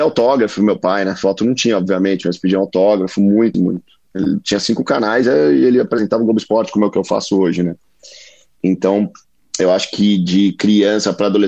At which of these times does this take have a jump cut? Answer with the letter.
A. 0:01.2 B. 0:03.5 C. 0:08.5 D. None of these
B